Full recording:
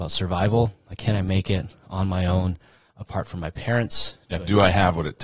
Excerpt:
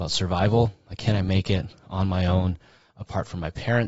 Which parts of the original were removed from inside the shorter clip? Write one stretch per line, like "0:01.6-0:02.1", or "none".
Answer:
none